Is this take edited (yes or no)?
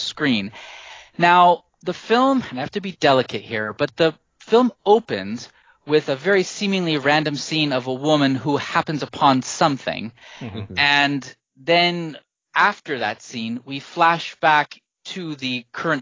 no